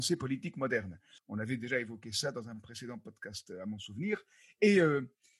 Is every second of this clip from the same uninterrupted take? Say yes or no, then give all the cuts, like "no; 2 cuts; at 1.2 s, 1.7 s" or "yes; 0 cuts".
no; 1 cut; at 1.2 s